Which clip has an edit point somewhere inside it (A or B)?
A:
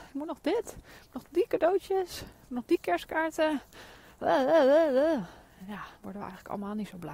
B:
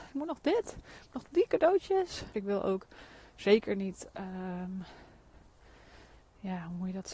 B